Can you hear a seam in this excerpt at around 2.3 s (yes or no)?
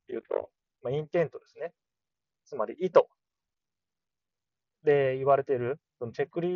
no